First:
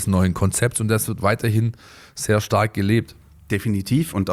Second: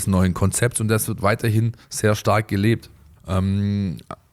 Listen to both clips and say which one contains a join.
second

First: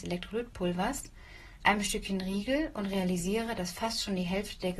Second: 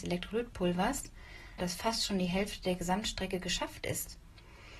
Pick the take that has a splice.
second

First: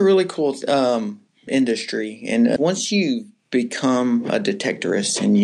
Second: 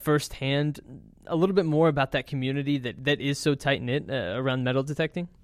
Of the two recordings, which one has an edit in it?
first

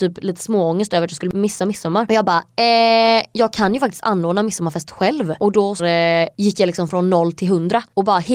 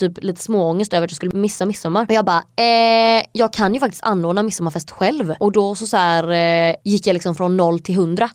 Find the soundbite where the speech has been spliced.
first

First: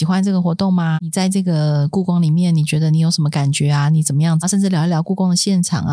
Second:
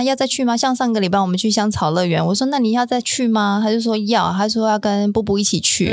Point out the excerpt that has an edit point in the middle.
first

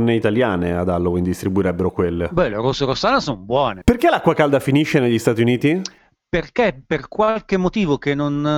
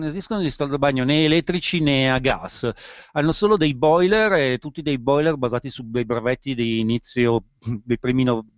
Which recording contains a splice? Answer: first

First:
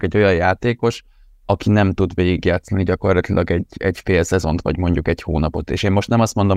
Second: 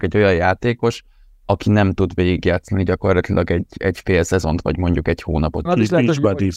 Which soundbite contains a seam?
second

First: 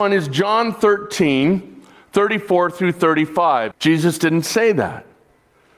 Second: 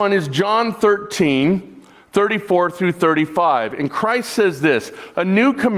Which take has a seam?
first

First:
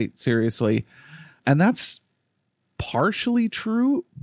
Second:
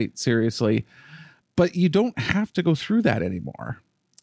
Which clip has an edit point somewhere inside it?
second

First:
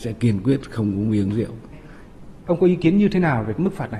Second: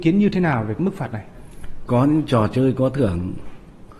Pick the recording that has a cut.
first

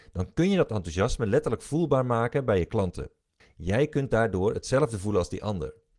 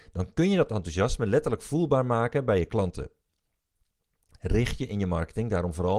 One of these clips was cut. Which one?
first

